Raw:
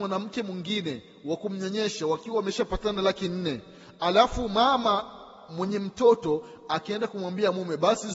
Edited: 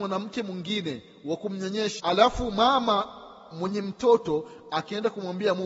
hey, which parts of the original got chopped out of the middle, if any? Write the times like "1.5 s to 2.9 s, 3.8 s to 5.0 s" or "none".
2.0 s to 4.0 s